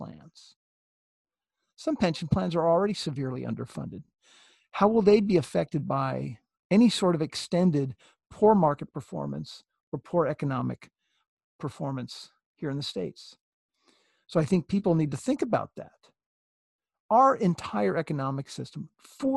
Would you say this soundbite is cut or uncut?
uncut